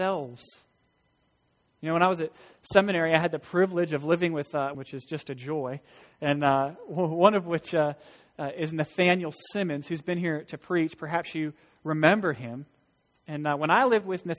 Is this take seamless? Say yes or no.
no